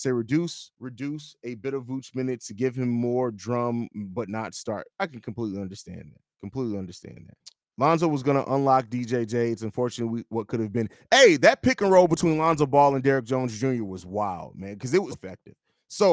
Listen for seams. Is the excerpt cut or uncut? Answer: cut